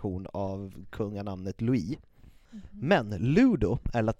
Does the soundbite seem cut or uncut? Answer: cut